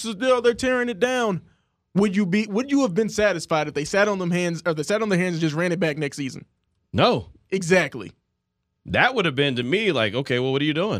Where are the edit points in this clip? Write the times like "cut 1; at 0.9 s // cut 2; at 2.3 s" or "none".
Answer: none